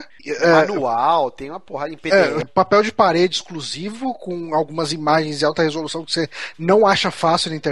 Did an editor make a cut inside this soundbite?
yes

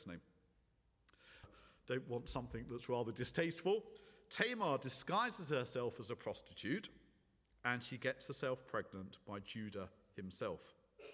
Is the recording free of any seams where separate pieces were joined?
no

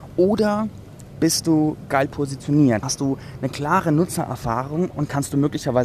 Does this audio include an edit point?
yes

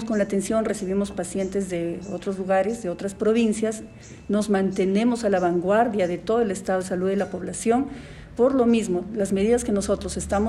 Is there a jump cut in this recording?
no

